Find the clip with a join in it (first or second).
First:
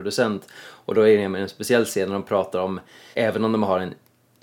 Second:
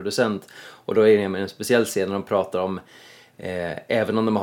first